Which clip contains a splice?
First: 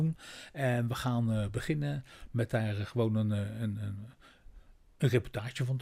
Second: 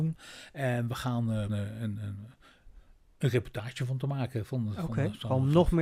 second; 1 cut; at 1.5 s

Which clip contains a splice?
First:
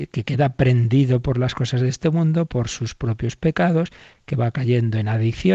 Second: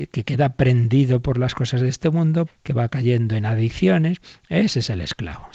second; 1 cut; at 2.5 s

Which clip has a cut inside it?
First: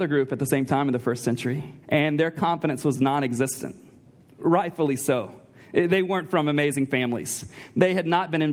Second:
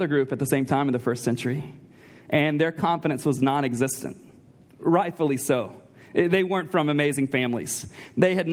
first; 1 cut; at 1.8 s

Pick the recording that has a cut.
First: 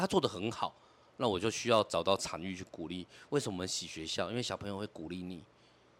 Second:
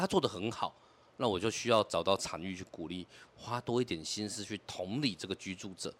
second; 1 cut; at 3.3 s

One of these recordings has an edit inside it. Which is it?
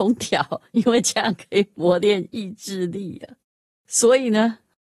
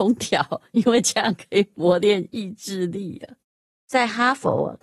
second; 1 cut; at 3.7 s

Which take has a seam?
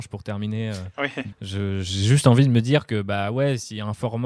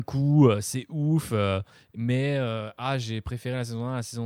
first; 1 cut; at 1.3 s

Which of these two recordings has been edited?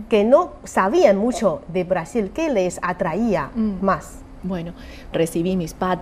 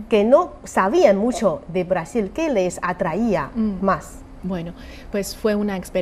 first; 1 cut; at 5.1 s

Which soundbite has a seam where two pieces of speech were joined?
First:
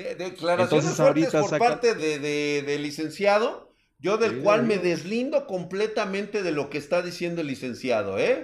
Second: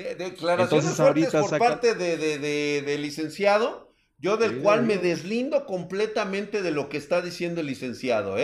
first; 1 cut; at 2.0 s

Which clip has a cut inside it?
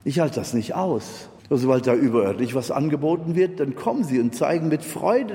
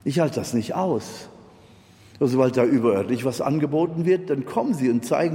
first; 1 cut; at 1.4 s

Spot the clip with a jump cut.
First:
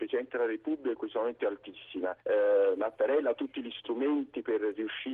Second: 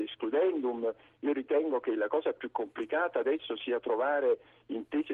first; 1 cut; at 2.2 s

